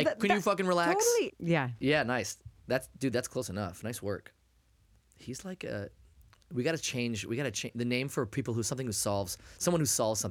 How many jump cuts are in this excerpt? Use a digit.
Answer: 1